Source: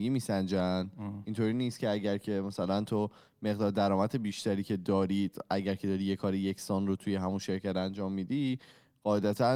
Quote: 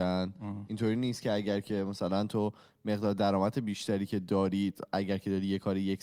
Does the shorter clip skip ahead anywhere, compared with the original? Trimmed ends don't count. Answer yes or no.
no